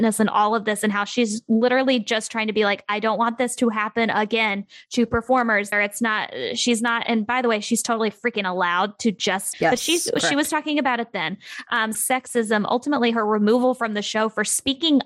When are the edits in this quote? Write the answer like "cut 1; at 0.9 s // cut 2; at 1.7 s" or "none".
cut 1; at 5.7 s // cut 2; at 9.5 s // cut 3; at 11.9 s